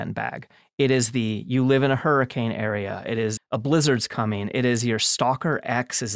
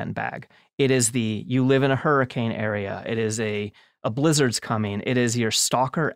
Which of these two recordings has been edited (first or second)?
first